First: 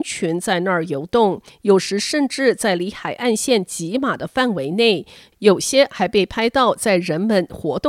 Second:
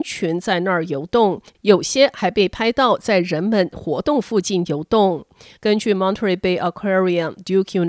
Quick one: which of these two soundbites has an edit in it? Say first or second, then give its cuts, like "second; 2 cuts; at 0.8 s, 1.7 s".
second; 2 cuts; at 1.5 s, 5.6 s